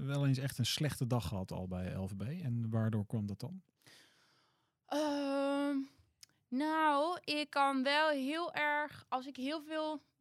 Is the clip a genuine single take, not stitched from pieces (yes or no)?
yes